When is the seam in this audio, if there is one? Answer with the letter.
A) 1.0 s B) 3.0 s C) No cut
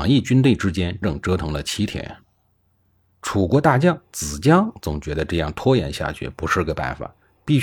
A